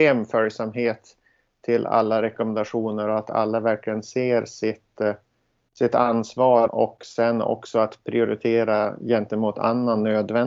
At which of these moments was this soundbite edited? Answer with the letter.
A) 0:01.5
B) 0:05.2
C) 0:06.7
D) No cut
C